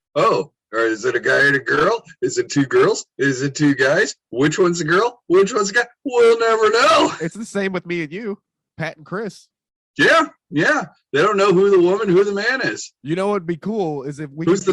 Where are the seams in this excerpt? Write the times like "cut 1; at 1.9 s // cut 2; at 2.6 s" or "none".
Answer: none